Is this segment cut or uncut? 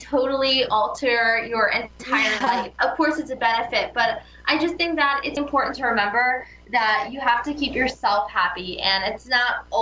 cut